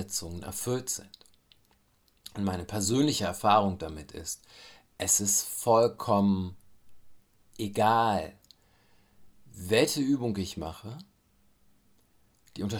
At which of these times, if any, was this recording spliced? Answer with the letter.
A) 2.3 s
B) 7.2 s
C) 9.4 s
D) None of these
A